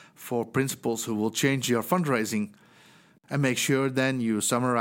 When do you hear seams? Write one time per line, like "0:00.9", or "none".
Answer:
0:03.2